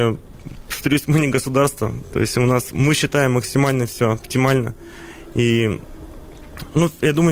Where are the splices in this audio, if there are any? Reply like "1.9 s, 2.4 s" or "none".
none